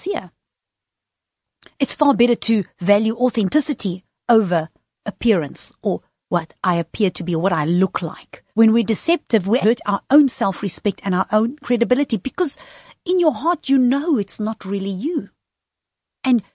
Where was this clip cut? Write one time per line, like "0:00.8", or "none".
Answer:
0:08.5
0:09.6